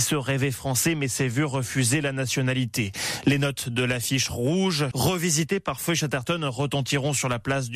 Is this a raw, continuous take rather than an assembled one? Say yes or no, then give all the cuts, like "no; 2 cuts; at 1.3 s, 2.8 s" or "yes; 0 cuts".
no; 1 cut; at 4.9 s